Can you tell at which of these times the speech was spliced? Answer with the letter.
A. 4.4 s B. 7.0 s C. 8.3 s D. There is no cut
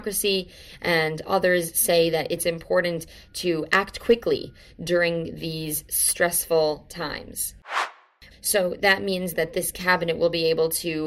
C